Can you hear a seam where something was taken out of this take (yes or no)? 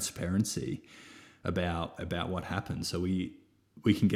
no